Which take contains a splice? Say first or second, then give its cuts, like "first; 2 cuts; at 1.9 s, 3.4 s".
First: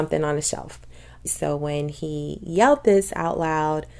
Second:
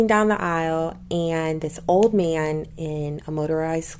first; 1 cut; at 1.3 s